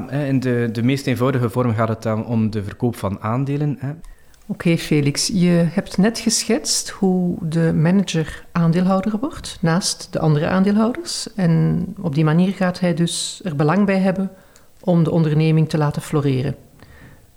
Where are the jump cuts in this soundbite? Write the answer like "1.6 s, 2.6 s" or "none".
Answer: 4.0 s